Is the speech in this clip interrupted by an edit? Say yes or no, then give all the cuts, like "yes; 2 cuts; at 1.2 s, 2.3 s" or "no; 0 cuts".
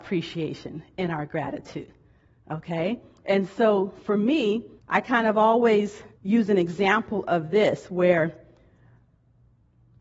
yes; 2 cuts; at 4.8 s, 6.1 s